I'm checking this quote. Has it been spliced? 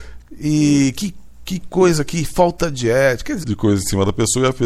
yes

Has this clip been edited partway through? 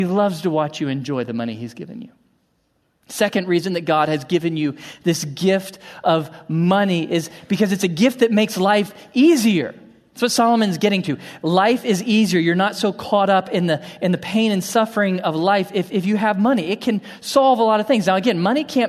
no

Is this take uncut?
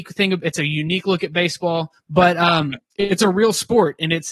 no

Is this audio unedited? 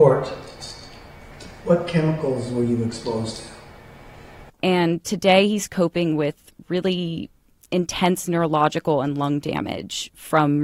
no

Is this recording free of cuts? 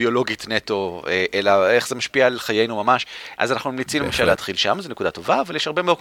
no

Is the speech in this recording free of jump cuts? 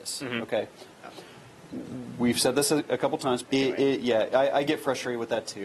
no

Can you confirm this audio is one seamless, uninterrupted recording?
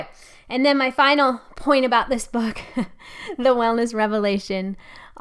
yes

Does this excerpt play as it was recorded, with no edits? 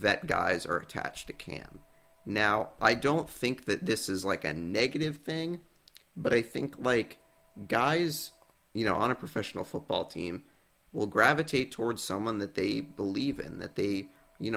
yes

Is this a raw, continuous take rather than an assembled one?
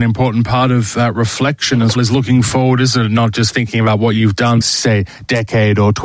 no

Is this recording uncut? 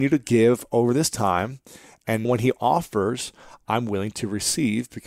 no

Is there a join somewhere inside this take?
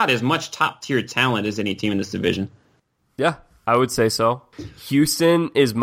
no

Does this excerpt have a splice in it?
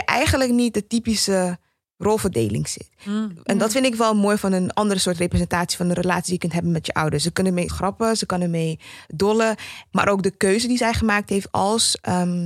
yes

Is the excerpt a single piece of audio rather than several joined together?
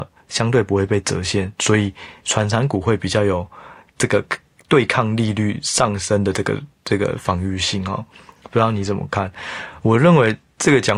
yes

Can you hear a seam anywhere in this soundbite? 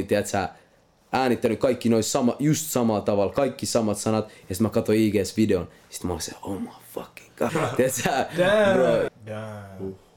yes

